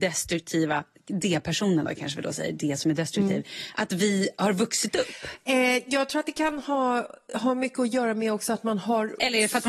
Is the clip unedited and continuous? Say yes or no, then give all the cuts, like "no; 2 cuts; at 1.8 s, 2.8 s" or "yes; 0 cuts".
yes; 0 cuts